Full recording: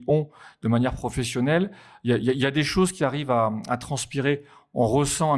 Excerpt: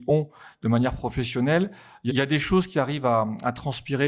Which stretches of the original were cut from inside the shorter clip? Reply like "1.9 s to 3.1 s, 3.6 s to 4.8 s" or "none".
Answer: 2.1 s to 2.3 s